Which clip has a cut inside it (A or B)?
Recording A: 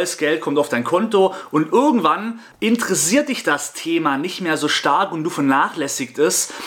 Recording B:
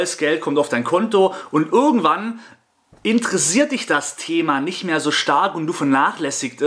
A